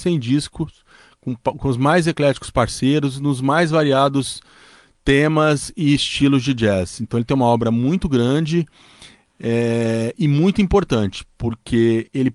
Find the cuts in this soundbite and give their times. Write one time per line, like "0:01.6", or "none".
none